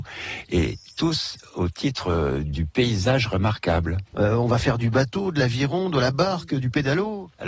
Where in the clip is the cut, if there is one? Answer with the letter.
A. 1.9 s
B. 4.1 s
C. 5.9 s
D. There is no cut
B